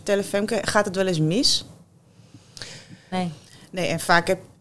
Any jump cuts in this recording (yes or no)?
yes